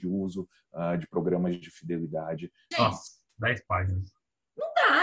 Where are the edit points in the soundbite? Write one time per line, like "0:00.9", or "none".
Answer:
0:02.7